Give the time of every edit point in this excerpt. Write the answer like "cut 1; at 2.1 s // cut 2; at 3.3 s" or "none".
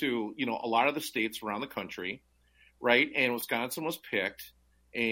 none